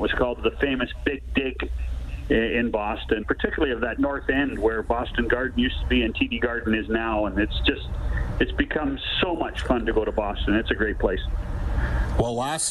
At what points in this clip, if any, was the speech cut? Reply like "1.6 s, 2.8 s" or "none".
3.2 s

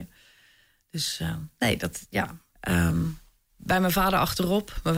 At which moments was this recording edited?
2.5 s

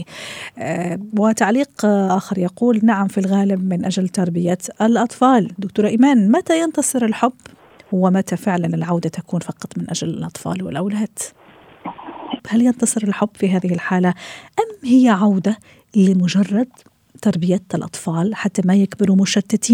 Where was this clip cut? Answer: 12.4 s

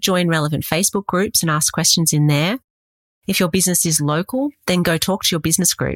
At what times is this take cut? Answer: none

